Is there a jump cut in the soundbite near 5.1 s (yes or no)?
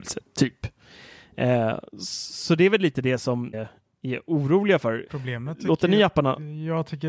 yes